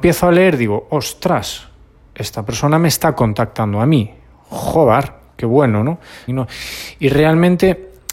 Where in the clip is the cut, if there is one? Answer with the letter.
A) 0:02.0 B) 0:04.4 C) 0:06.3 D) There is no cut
C